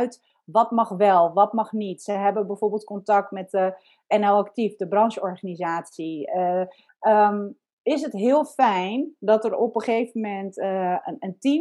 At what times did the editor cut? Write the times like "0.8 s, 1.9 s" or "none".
6.9 s